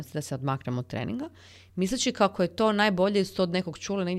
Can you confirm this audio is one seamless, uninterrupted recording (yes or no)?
yes